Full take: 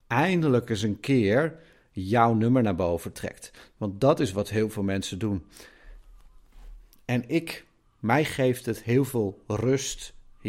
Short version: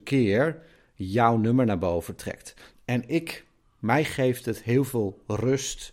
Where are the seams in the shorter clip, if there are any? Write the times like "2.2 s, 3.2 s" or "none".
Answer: 2.7 s